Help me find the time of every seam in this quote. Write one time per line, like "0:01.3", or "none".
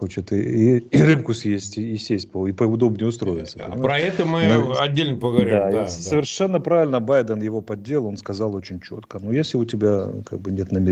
none